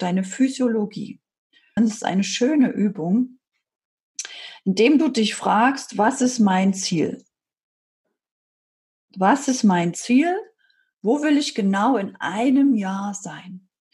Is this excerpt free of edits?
no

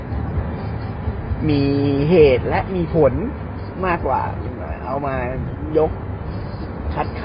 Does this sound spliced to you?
yes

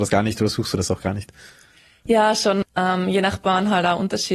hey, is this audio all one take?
no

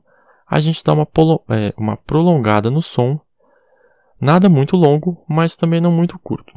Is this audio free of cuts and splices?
yes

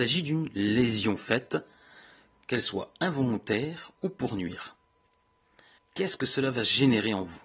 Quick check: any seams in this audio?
yes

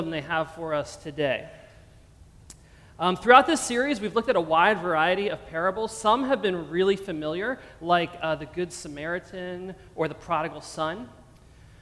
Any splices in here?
no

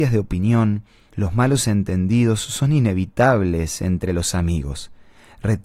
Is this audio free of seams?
no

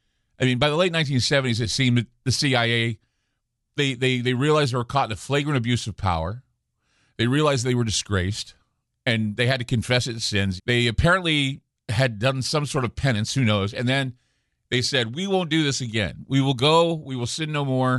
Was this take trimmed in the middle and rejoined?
yes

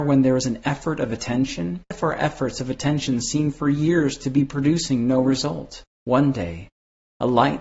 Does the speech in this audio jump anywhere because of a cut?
yes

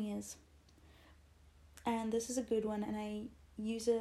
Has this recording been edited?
no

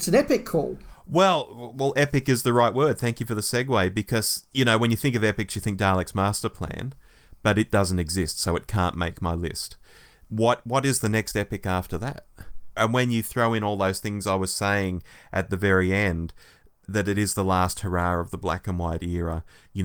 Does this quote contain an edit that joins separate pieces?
yes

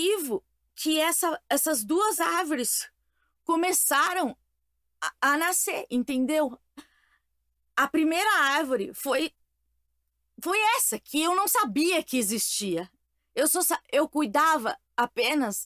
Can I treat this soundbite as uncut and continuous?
yes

